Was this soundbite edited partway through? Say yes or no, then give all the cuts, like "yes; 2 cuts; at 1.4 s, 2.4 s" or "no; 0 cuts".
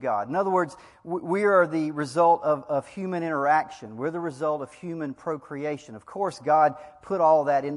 no; 0 cuts